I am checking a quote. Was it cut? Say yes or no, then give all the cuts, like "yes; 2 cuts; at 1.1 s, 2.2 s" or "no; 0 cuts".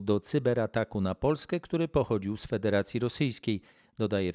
no; 0 cuts